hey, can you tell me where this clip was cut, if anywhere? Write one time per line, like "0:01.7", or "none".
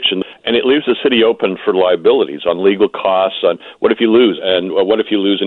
0:04.4